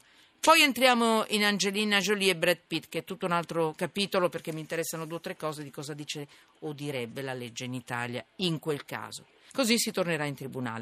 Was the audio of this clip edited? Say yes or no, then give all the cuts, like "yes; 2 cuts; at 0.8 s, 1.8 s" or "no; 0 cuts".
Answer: yes; 1 cut; at 9.5 s